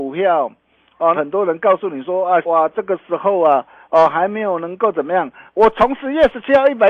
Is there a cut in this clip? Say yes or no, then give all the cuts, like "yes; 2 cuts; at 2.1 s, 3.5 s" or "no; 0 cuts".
yes; 3 cuts; at 1.1 s, 2.4 s, 5.5 s